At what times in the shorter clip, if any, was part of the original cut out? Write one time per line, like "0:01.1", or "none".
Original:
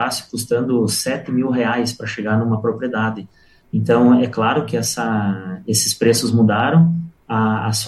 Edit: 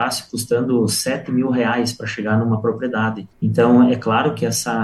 0:03.3